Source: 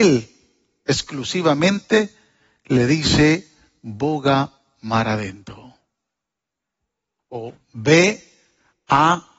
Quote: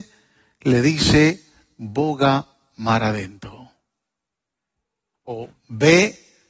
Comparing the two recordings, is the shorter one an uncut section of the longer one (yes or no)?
yes